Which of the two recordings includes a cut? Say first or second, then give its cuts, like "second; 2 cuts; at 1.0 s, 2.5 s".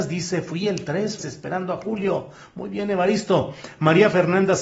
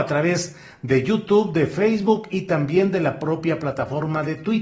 first; 1 cut; at 1.2 s